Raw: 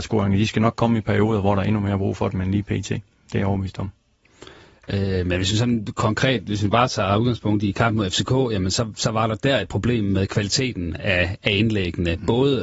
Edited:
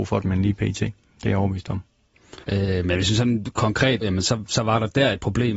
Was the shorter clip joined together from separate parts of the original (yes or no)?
yes